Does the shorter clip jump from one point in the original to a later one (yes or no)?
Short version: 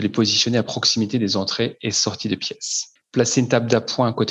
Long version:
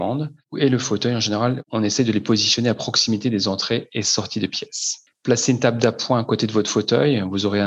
no